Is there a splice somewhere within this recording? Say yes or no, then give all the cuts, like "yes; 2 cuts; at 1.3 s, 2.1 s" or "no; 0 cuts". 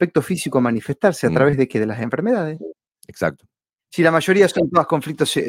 no; 0 cuts